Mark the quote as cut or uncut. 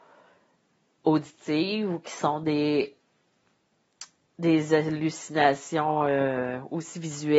uncut